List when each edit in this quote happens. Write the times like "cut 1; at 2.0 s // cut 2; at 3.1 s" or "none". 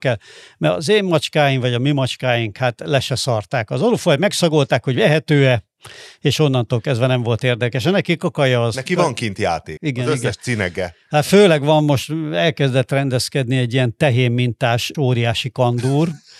cut 1; at 9.8 s // cut 2; at 14.9 s